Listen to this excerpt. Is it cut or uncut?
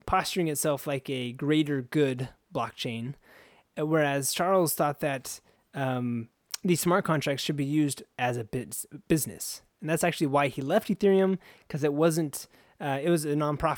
uncut